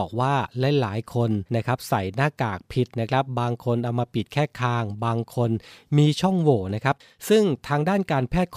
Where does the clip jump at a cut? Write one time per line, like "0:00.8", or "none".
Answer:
0:01.5